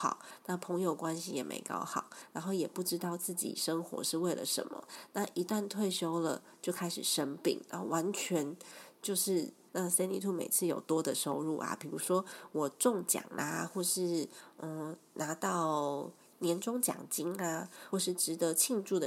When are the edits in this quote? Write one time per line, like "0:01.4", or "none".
0:09.7
0:17.9